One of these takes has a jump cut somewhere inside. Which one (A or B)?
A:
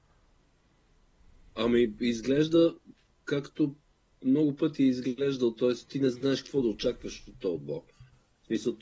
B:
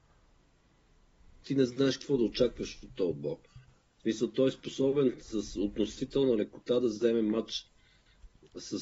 B